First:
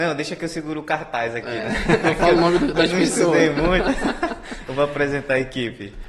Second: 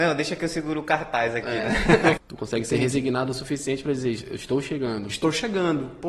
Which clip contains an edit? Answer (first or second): second